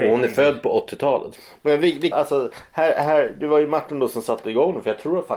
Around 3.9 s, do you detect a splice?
no; 1 cut; at 2.1 s

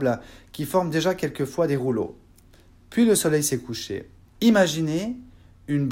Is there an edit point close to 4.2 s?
yes; 1 cut; at 4.2 s

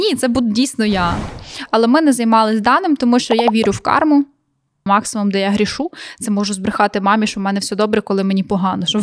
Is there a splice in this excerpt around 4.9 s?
yes; 1 cut; at 4.9 s

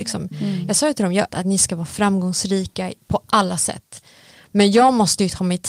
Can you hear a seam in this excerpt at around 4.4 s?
no; 2 cuts; at 1.3 s, 3.0 s

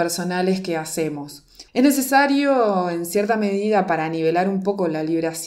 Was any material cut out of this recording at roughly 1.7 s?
yes; 1 cut; at 1.7 s

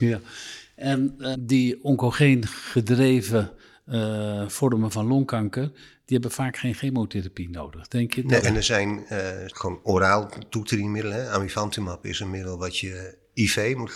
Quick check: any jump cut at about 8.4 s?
yes; 3 cuts; at 1.3 s, 8.4 s, 9.5 s

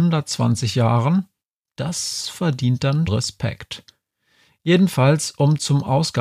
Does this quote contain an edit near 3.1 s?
yes; 1 cut; at 3.1 s

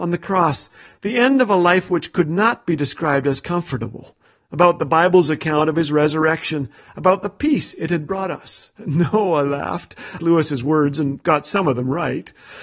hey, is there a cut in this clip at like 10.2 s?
yes; 2 cuts; at 8.8 s, 10.2 s

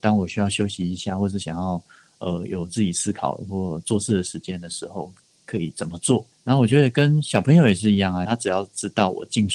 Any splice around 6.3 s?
yes; 2 cuts; at 6.3 s, 8.3 s

